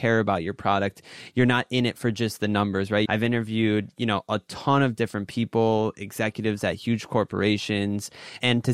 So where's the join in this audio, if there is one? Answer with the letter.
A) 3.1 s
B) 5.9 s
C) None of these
A